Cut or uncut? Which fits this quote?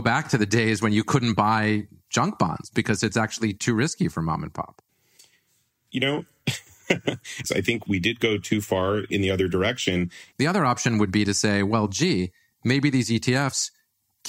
cut